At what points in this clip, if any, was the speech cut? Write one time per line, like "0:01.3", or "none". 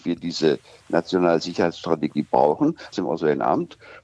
0:02.9